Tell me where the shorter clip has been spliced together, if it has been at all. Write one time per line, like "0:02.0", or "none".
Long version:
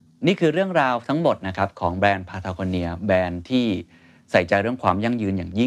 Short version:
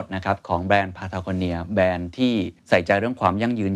0:02.6